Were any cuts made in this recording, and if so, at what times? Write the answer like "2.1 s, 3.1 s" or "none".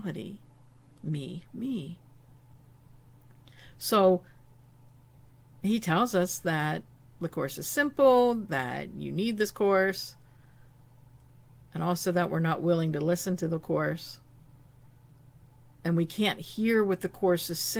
1.5 s